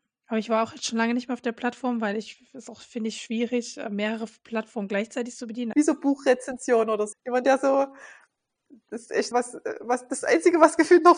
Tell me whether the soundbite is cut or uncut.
cut